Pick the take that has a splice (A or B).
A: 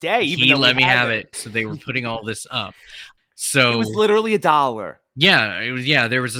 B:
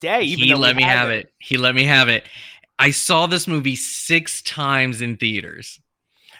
A